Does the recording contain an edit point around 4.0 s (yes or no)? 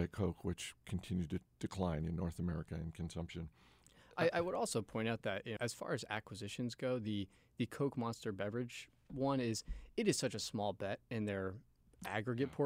no